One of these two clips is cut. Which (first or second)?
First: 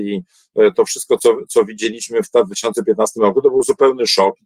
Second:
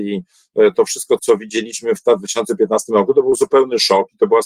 second